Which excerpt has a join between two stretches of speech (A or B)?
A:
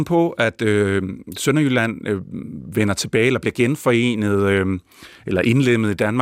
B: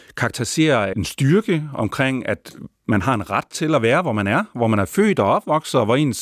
B